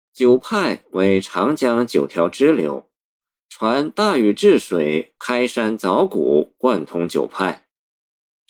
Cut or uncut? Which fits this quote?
uncut